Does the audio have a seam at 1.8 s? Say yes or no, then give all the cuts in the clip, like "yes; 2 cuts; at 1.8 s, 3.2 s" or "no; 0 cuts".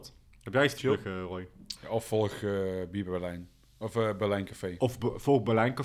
yes; 1 cut; at 1.8 s